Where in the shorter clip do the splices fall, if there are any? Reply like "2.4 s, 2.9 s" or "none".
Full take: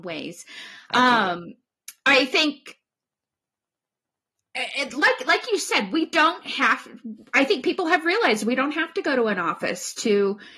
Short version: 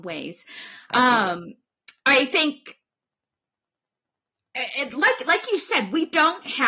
none

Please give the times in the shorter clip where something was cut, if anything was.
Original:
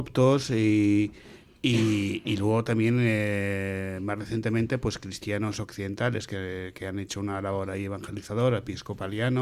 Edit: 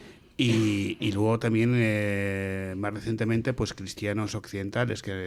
none

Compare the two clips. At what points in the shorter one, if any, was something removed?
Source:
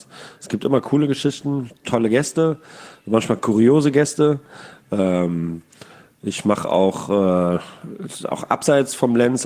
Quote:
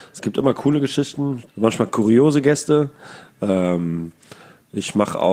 1.5 s

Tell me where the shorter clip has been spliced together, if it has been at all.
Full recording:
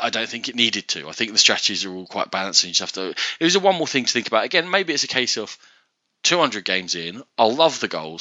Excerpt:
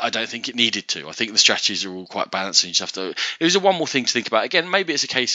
none

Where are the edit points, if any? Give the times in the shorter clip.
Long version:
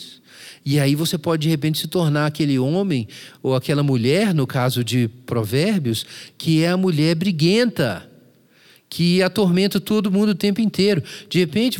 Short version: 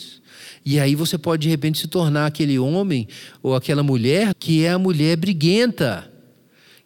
4.3 s

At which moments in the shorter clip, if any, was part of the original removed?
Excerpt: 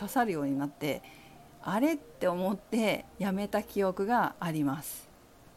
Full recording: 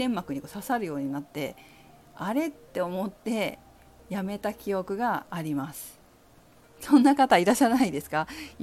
3.1 s

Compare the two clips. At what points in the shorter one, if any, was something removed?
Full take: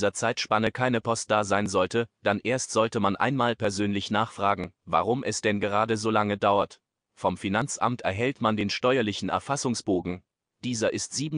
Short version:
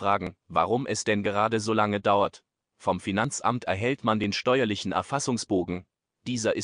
none

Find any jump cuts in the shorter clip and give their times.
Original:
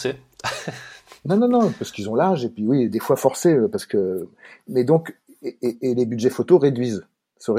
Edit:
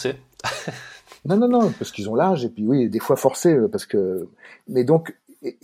none

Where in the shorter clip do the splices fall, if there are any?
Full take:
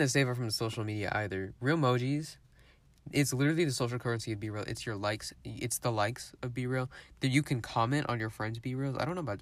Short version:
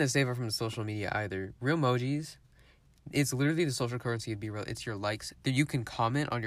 5.4 s

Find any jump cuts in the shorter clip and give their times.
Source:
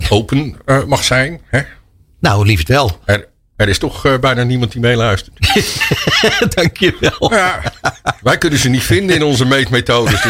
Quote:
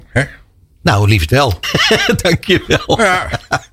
1.6 s

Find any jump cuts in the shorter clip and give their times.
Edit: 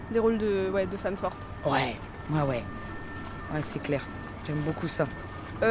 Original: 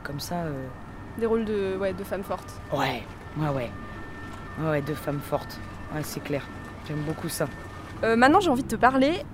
3.5 s

